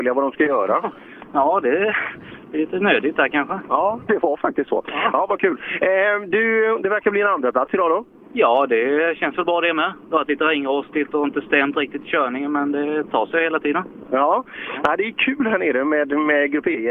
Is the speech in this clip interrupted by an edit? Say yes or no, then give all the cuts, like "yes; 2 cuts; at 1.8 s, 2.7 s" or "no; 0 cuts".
yes; 1 cut; at 4.1 s